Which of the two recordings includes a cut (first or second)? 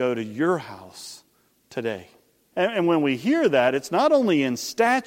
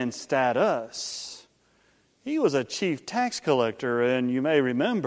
first